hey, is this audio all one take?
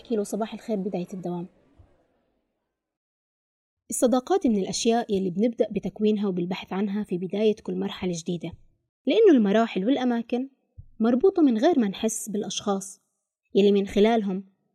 yes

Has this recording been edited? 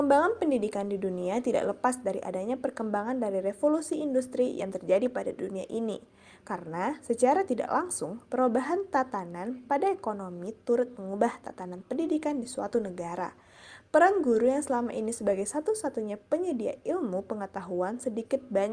no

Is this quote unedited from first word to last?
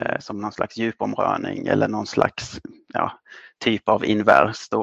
yes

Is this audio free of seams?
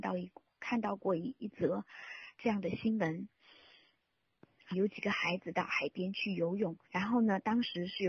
no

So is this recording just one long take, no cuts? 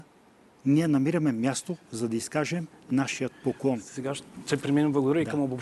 yes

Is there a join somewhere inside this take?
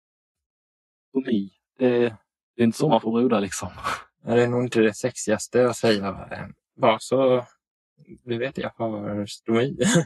no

